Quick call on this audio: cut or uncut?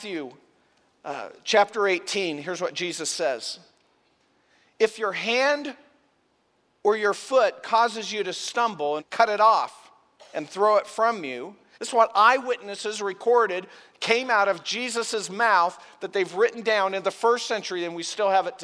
cut